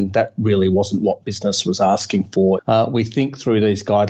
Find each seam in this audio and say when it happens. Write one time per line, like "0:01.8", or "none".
0:02.6